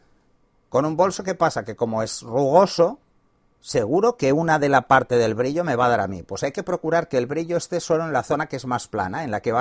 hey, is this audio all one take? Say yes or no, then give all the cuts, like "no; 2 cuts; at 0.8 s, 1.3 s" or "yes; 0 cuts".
yes; 0 cuts